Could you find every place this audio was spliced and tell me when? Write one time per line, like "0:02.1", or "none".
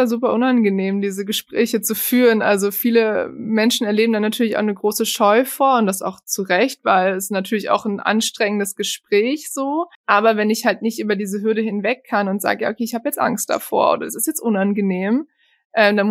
0:09.9